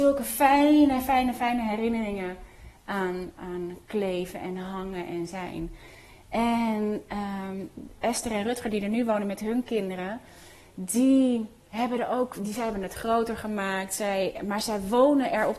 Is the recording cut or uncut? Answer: cut